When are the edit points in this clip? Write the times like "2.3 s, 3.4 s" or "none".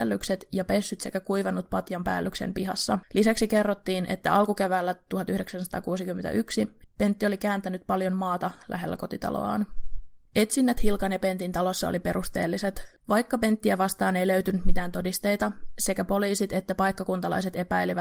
6.8 s, 10.3 s, 13.0 s

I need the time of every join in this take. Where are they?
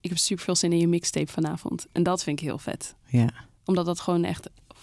none

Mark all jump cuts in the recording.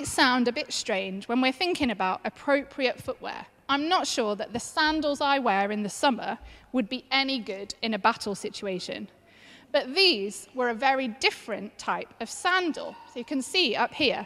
none

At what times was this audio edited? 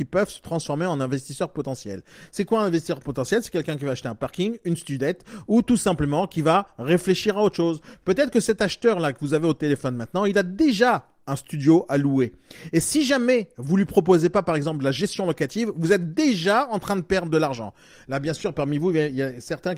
none

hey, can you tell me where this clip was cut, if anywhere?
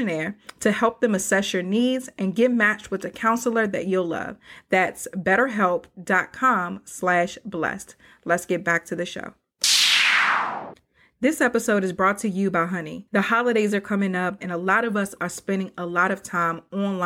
13.1 s, 14.4 s

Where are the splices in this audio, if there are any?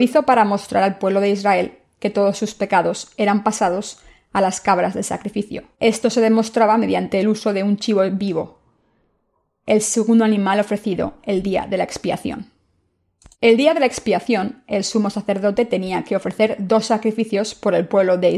5.7 s, 13.3 s

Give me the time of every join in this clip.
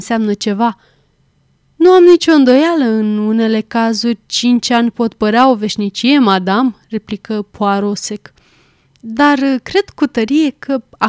none

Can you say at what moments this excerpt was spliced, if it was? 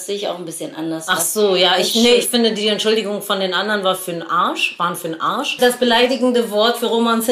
5.6 s

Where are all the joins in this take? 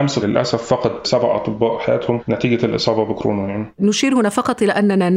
3.7 s

